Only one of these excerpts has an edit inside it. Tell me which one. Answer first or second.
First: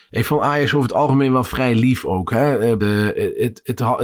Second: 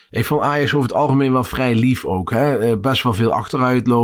first